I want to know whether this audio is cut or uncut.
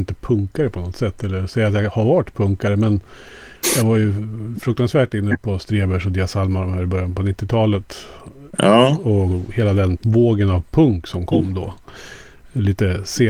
cut